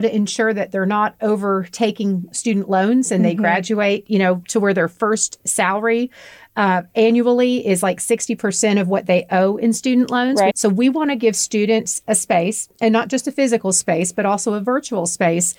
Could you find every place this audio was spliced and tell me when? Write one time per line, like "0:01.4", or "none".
0:04.4
0:10.5